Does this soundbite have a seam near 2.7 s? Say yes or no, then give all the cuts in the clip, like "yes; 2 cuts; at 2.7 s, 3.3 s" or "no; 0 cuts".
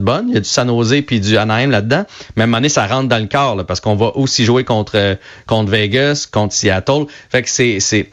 no; 0 cuts